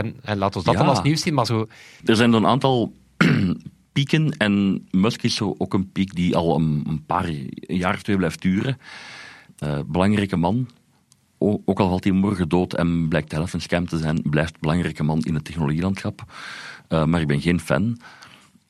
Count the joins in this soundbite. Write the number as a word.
two